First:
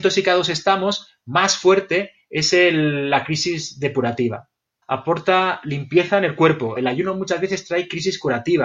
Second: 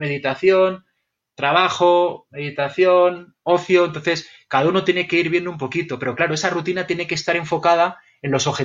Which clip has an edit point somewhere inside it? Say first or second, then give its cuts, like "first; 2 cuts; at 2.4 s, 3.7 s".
first; 2 cuts; at 4.8 s, 6.8 s